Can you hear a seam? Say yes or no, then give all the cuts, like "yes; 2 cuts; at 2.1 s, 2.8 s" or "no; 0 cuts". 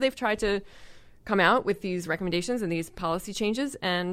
no; 0 cuts